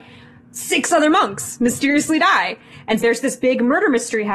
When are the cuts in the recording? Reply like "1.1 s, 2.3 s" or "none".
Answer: 3.0 s